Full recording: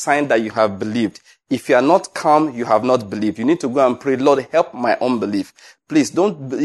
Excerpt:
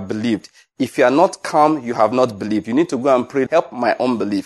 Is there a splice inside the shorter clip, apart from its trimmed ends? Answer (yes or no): yes